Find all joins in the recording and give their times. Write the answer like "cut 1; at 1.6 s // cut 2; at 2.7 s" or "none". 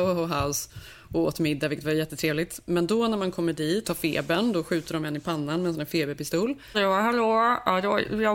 cut 1; at 3.8 s // cut 2; at 6.7 s